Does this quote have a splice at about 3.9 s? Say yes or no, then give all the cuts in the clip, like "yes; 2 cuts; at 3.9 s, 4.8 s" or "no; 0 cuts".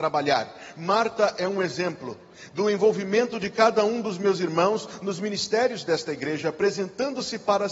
no; 0 cuts